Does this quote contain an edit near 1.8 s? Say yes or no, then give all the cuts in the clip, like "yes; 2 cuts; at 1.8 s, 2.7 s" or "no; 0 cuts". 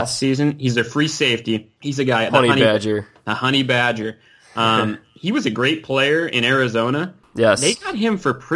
yes; 1 cut; at 1.8 s